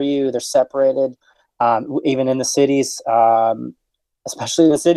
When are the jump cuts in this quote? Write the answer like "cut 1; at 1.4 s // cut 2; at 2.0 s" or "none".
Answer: none